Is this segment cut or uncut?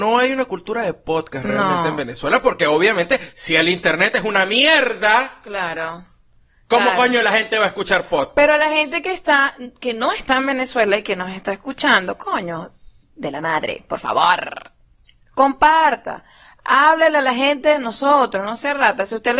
uncut